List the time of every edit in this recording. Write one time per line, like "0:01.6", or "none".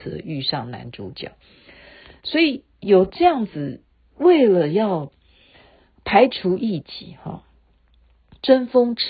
none